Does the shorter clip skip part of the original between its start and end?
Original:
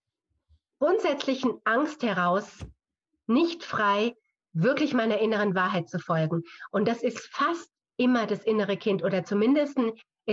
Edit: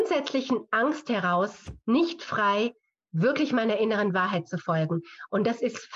yes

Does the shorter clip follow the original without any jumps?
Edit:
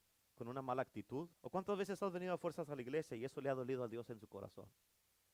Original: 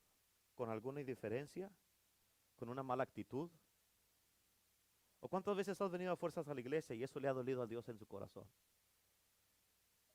no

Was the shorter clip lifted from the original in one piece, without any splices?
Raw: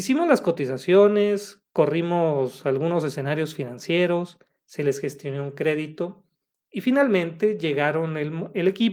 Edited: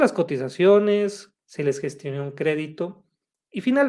no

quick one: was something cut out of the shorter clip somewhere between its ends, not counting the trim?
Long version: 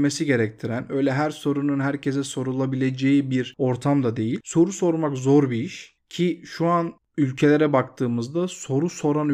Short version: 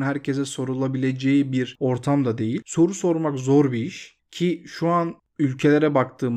no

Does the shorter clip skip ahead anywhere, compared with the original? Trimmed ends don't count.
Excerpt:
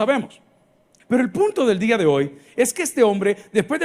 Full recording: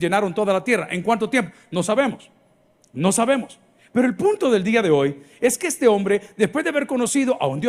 yes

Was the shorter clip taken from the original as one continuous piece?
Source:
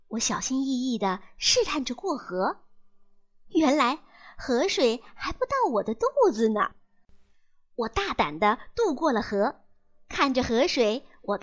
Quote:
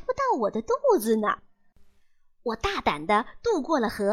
yes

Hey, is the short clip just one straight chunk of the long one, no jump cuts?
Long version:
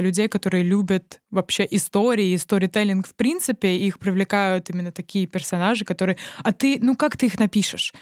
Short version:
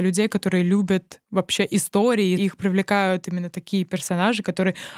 no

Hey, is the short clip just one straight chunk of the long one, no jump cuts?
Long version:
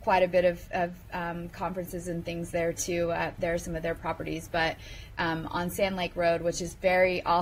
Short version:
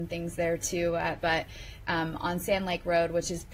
no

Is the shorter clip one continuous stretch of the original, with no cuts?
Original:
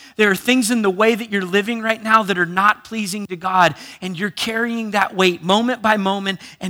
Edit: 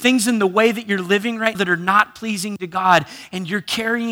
no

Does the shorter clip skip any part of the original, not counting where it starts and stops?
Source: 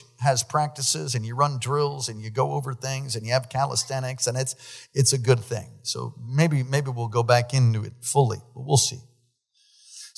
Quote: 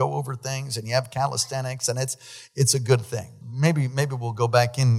yes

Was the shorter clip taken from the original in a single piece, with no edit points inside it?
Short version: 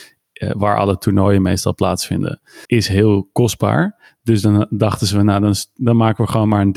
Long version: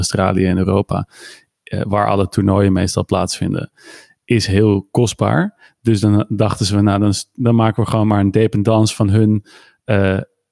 no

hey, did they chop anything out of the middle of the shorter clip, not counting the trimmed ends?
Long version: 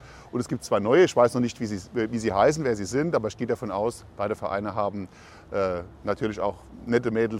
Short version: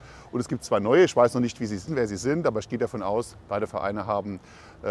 yes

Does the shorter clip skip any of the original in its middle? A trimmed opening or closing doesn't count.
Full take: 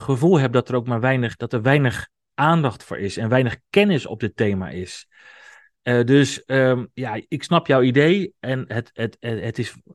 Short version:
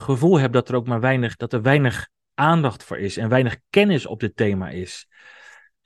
no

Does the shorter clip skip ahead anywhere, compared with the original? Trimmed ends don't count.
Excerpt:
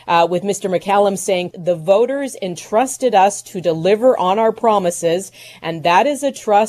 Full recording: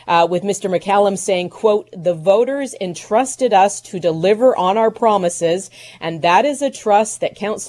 yes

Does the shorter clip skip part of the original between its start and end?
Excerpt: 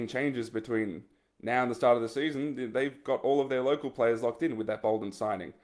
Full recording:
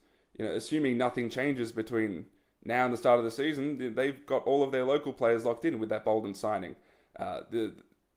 no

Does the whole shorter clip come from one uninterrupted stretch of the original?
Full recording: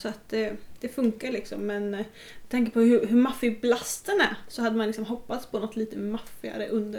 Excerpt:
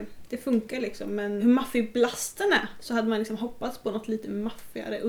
no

